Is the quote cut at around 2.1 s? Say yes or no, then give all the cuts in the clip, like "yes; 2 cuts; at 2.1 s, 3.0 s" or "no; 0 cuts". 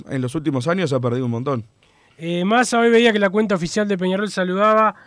yes; 1 cut; at 2.1 s